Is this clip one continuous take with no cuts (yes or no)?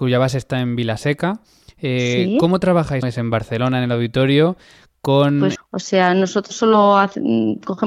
no